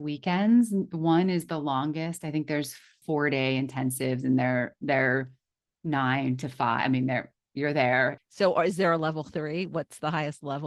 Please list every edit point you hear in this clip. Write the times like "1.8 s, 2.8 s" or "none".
3.0 s, 8.2 s